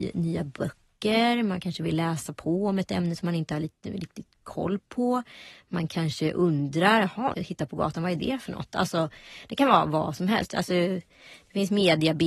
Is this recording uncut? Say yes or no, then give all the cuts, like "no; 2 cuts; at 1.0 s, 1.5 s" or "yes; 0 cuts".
no; 2 cuts; at 7.3 s, 10.5 s